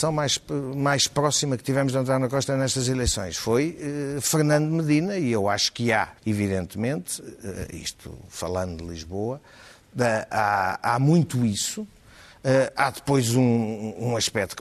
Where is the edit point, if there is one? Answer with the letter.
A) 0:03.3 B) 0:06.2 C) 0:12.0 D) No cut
B